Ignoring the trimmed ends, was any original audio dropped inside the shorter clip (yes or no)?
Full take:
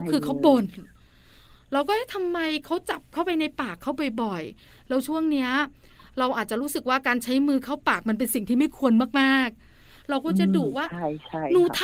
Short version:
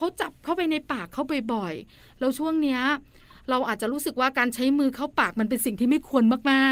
no